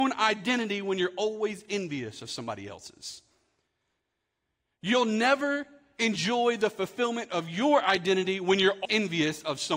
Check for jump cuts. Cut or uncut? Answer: cut